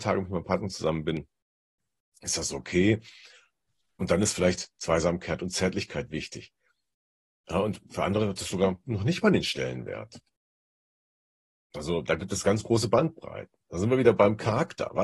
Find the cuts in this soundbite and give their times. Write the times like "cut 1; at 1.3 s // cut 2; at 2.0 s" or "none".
none